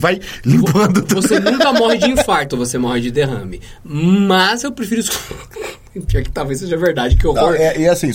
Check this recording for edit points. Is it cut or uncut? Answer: uncut